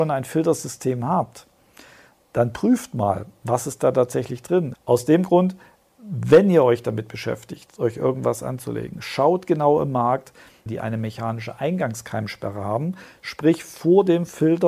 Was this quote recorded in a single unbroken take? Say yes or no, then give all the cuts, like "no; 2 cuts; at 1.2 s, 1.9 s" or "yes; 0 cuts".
no; 2 cuts; at 4.7 s, 10.7 s